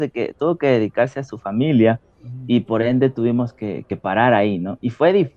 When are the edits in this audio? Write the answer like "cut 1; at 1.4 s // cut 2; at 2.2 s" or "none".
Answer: none